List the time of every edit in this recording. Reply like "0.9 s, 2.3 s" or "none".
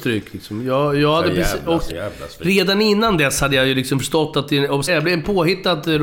1.9 s, 4.9 s